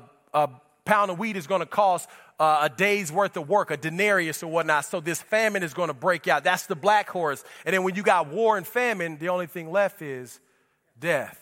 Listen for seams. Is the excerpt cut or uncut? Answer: uncut